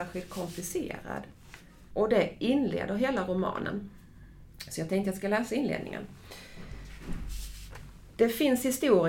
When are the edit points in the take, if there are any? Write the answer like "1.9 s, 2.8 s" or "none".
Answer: 1.9 s